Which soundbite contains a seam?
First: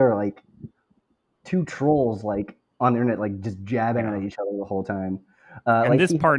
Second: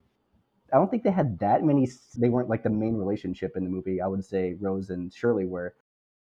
second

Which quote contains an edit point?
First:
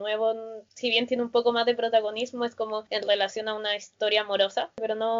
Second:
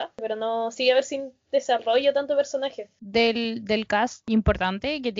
second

